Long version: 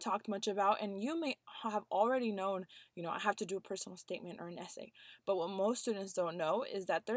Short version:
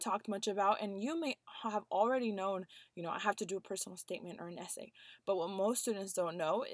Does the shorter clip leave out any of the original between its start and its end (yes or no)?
no